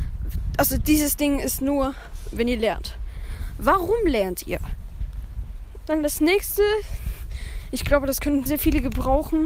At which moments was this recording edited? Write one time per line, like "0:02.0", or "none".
0:02.3
0:05.8
0:08.5